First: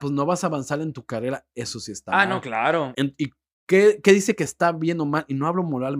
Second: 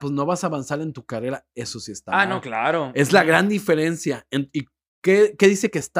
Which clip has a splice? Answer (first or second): first